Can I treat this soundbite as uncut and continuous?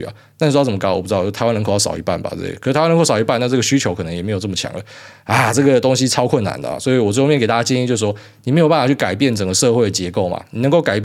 yes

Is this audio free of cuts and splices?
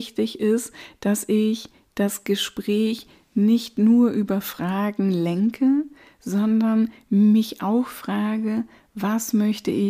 yes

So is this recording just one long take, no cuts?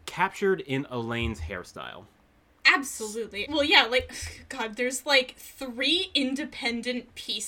no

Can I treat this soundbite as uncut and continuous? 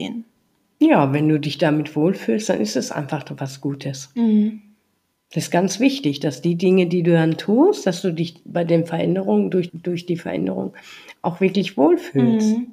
no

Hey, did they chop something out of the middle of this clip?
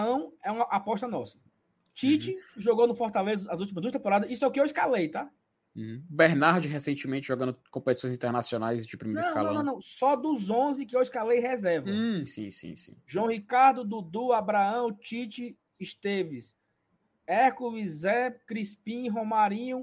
yes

